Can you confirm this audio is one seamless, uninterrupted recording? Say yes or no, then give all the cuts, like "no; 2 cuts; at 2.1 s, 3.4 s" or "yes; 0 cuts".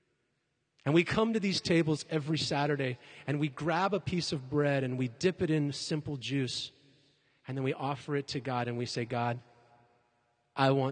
yes; 0 cuts